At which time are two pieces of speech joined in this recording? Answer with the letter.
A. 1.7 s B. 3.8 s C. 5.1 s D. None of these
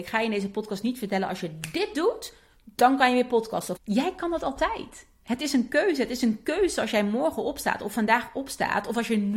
B